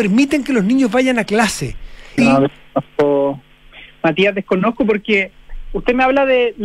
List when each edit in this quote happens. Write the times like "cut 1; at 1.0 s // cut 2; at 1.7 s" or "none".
cut 1; at 2.2 s